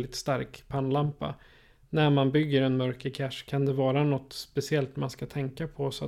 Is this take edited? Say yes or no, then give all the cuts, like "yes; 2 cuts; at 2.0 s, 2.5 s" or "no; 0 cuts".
no; 0 cuts